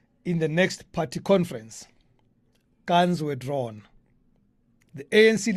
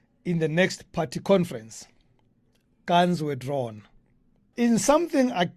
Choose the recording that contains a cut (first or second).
second